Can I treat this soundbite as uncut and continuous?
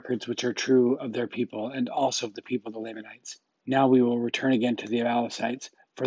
yes; 0 cuts

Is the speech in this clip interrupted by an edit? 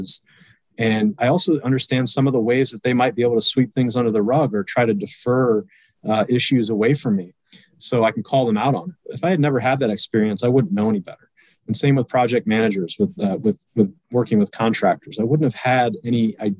no; 0 cuts

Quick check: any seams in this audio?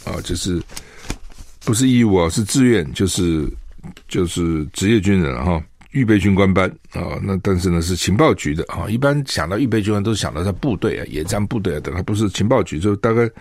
no; 0 cuts

